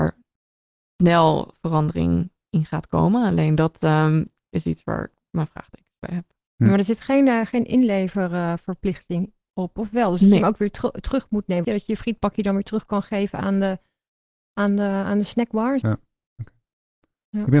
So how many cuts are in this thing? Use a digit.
2